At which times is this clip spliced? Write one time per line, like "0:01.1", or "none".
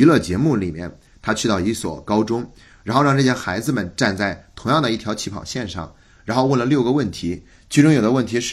none